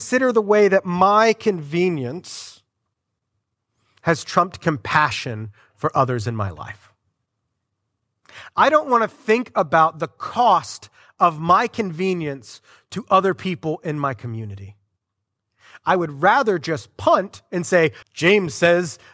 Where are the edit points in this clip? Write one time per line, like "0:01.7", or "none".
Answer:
0:08.5
0:18.0